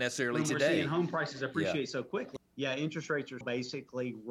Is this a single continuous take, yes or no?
no